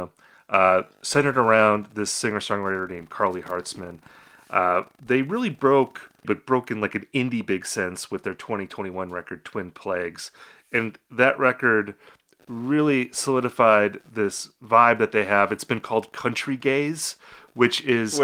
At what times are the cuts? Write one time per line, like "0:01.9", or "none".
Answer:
0:06.2